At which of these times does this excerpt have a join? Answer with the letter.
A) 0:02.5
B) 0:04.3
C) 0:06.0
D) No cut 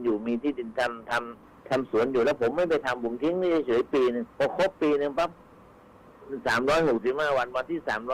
B